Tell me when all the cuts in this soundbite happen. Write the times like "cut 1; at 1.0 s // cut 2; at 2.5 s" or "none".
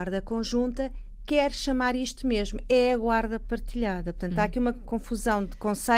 cut 1; at 4.8 s